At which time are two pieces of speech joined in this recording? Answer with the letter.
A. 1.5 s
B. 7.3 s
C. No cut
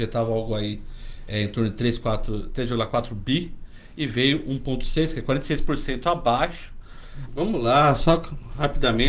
B